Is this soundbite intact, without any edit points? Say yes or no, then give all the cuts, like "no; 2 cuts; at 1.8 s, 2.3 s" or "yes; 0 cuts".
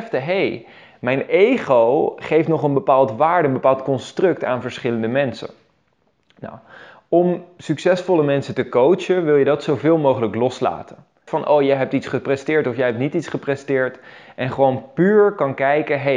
no; 1 cut; at 11.3 s